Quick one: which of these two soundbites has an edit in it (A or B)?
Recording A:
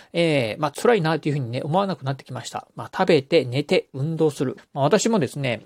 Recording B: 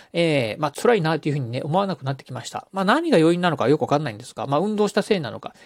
A